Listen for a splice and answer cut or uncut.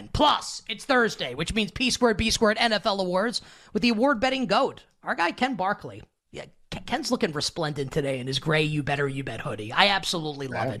uncut